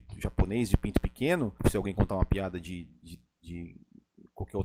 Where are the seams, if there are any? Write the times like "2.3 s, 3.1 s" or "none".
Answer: 1.6 s